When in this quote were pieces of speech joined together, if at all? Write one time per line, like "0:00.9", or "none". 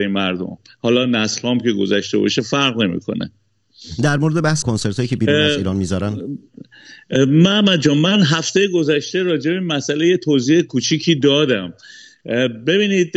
0:04.6